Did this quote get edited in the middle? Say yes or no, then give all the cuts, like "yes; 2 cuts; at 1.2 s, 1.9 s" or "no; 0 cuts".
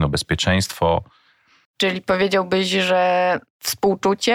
yes; 1 cut; at 1.7 s